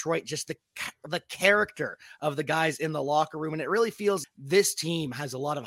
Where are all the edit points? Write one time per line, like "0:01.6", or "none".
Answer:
0:04.2